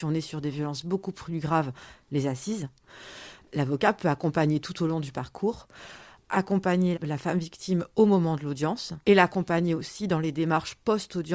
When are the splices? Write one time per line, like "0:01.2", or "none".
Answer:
0:06.9
0:09.0